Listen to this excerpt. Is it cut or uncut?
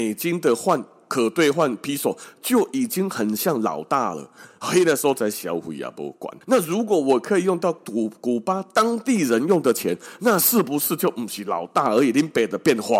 cut